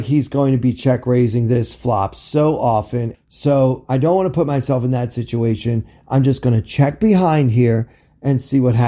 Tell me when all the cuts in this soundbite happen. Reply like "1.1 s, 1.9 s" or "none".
3.1 s